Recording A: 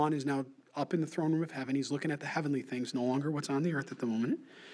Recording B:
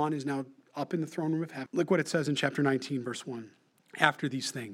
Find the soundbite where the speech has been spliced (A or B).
B